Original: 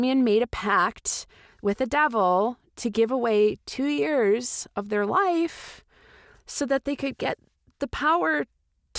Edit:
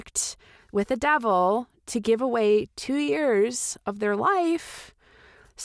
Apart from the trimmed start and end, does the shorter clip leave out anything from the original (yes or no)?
no